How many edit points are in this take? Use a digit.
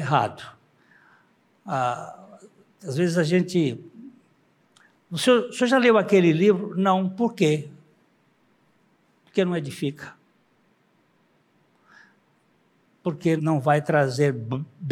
1